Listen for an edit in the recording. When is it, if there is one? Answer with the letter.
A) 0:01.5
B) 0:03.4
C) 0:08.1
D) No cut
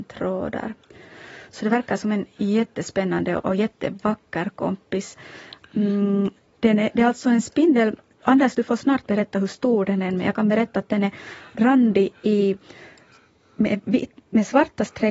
B